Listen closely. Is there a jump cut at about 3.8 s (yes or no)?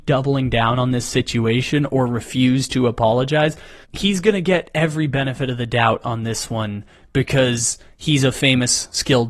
yes